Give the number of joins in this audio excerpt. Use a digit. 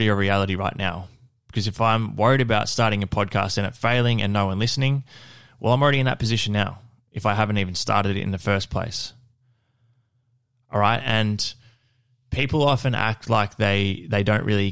0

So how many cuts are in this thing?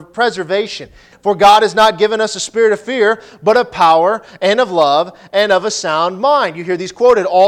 1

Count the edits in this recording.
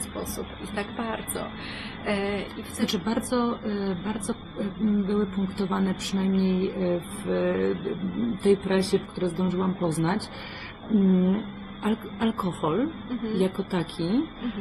1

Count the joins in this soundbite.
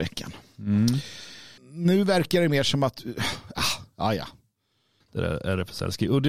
2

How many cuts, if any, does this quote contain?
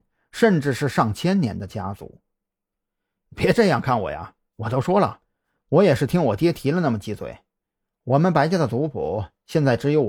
0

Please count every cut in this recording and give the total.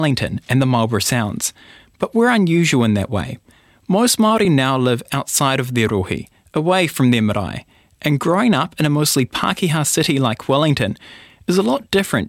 0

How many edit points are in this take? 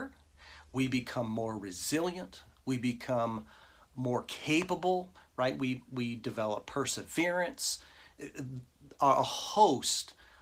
0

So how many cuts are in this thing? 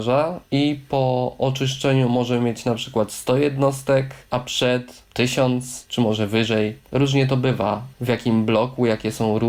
1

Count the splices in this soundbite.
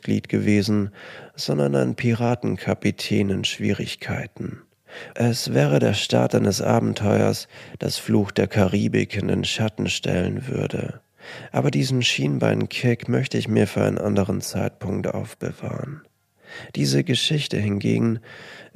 1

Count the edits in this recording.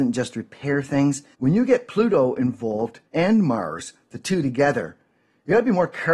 2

